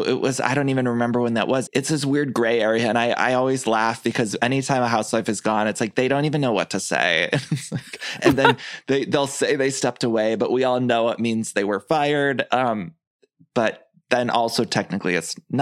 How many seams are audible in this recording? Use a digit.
1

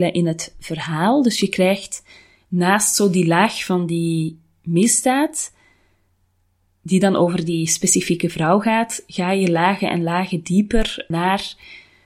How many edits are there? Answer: 1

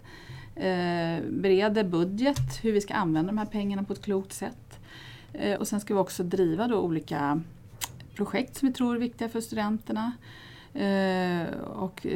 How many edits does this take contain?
1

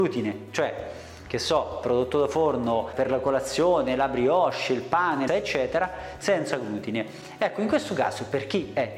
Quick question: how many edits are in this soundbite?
1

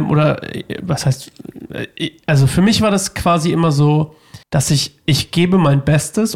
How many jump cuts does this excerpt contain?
1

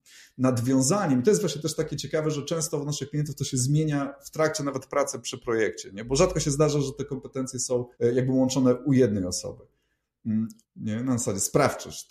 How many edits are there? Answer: 2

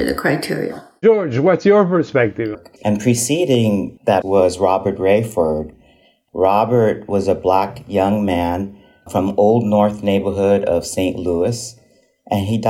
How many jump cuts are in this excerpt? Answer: 1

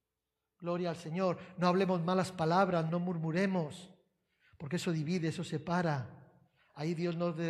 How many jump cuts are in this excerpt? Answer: 1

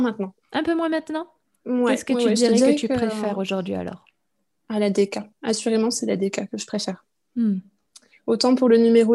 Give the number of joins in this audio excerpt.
0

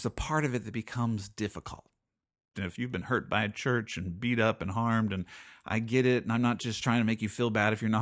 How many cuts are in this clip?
1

